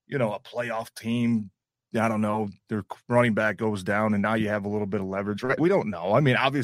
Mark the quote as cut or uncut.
cut